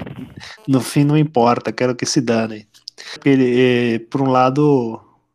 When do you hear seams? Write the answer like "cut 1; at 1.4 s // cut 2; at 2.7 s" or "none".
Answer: cut 1; at 3.2 s